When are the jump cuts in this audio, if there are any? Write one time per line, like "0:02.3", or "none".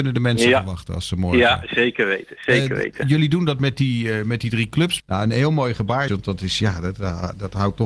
0:05.0
0:06.1